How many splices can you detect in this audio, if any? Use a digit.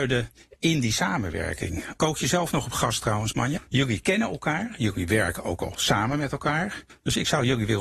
2